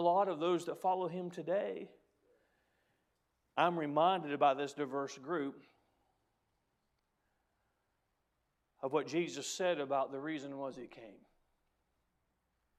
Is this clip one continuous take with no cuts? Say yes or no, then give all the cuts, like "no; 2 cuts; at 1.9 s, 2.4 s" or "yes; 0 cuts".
yes; 0 cuts